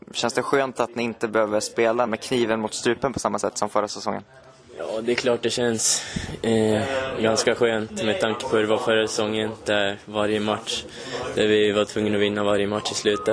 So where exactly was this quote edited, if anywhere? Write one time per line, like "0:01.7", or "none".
0:02.1